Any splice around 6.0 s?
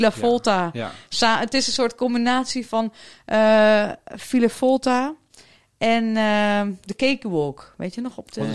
no; 0 cuts

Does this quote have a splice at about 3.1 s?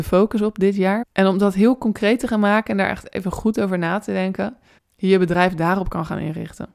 no; 2 cuts; at 1.0 s, 4.8 s

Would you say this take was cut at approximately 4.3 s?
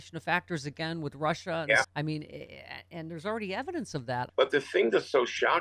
yes; 2 cuts; at 1.8 s, 4.3 s

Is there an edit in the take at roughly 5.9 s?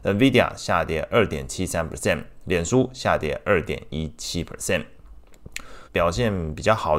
yes; 1 cut; at 5.9 s

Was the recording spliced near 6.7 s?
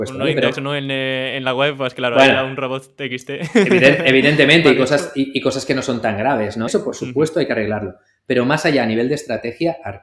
yes; 1 cut; at 6.7 s

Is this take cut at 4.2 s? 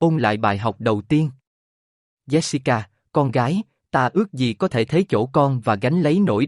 no; 1 cut; at 2.1 s

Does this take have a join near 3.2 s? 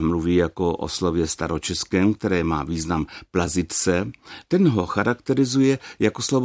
no; 1 cut; at 4.4 s

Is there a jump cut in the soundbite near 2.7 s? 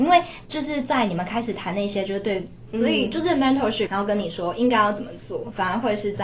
yes; 2 cuts; at 2.7 s, 3.9 s

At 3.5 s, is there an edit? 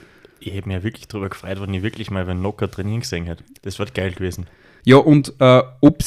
no; 1 cut; at 4.8 s

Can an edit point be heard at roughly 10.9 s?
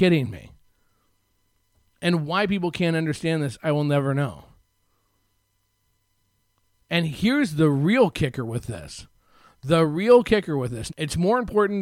yes; 1 cut; at 10.9 s

